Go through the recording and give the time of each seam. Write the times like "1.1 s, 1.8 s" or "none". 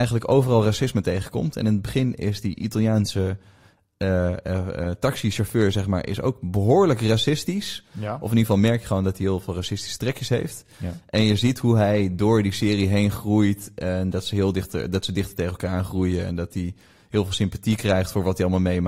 none